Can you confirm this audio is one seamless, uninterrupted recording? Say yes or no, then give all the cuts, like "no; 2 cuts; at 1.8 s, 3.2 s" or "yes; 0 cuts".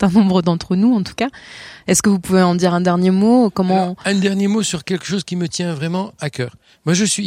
yes; 0 cuts